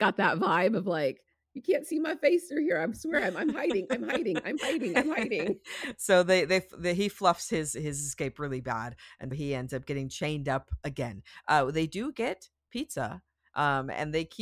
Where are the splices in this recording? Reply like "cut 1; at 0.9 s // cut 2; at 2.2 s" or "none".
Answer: cut 1; at 9.3 s